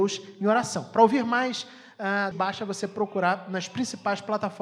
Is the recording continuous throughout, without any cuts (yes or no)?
no